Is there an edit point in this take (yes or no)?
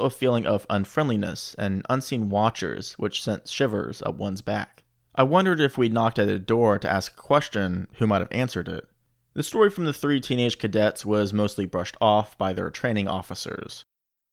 yes